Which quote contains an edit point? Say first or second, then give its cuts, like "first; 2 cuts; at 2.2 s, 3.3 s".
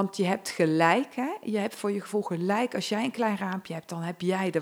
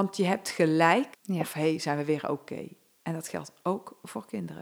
second; 2 cuts; at 1.1 s, 3.0 s